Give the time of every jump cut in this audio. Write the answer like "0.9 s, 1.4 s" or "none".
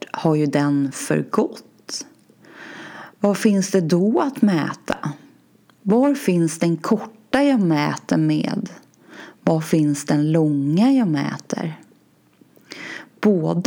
none

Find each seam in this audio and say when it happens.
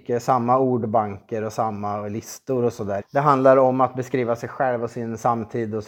3.0 s

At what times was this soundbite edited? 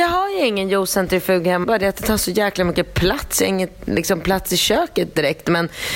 1.6 s

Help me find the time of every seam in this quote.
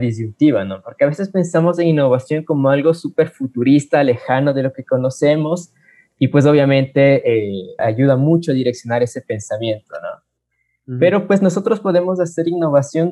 7.8 s

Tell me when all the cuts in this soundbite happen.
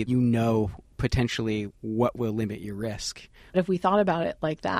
3.5 s

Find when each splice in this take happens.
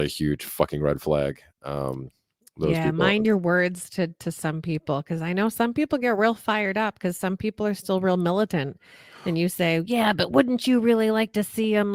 none

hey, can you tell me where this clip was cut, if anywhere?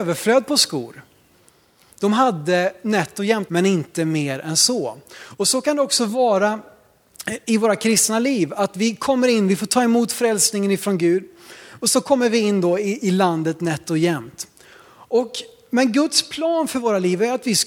3.5 s

